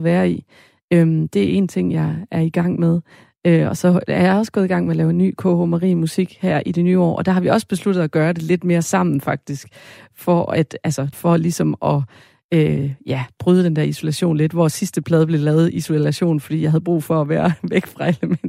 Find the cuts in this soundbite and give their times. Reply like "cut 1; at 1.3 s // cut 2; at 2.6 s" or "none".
cut 1; at 11.1 s